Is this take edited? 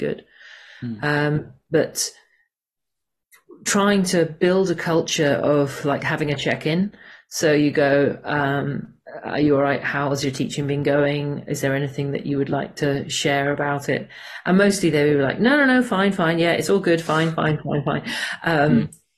no; 0 cuts

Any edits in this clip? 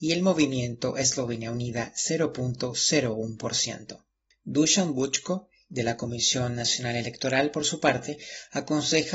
no; 0 cuts

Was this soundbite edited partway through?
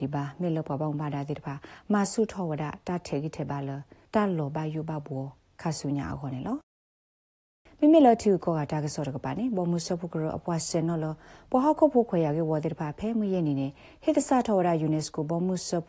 no; 0 cuts

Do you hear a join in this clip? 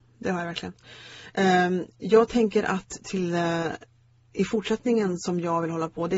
no; 0 cuts

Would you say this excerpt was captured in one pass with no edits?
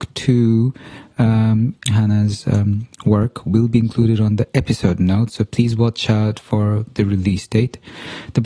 no; 1 cut; at 1.9 s

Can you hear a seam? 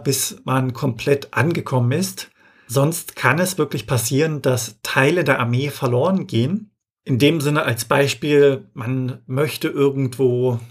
no; 0 cuts

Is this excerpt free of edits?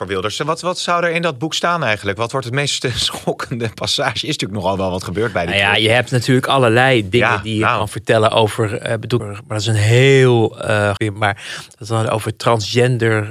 no; 2 cuts; at 9.2 s, 11.0 s

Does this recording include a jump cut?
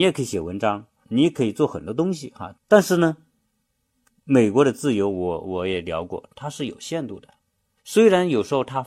yes; 3 cuts; at 1.0 s, 2.6 s, 7.8 s

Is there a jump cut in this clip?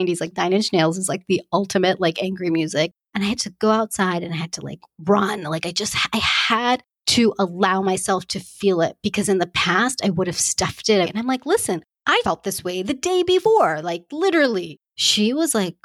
yes; 3 cuts; at 11.0 s, 12.2 s, 14.8 s

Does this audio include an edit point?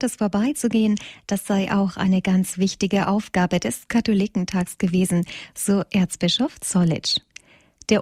no; 0 cuts

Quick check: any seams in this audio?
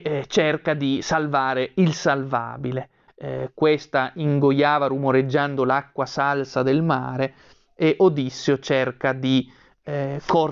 yes; 1 cut; at 3.1 s

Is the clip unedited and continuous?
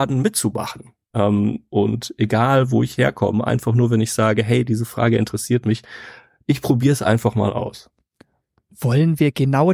yes; 0 cuts

